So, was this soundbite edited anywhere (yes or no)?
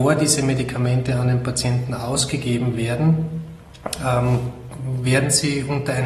no